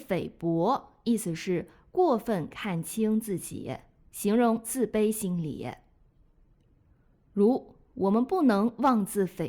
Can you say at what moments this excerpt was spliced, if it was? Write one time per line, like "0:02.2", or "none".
none